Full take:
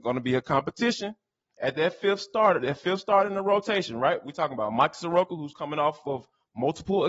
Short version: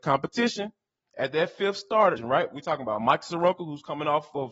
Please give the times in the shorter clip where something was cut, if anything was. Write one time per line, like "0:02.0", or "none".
0:02.2